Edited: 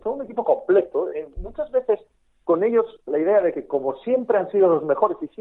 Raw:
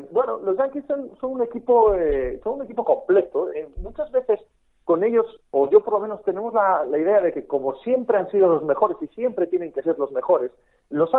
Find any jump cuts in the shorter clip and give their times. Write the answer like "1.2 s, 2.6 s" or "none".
3.1 s